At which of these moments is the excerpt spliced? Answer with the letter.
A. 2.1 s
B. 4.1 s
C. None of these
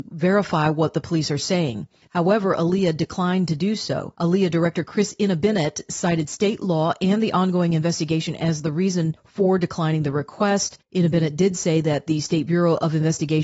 A